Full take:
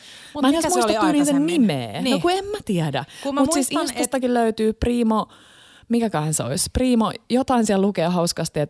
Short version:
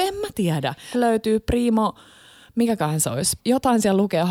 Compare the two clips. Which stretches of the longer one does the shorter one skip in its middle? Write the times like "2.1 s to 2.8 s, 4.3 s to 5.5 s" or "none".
3.2 s to 4.3 s, 6.7 s to 7.2 s